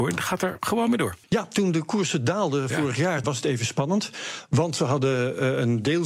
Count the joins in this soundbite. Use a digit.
2